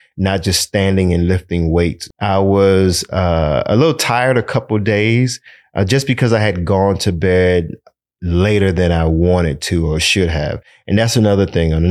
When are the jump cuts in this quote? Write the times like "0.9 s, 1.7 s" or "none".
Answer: 2.1 s